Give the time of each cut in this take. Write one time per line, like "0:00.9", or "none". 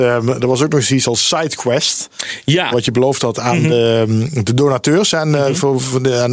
0:02.7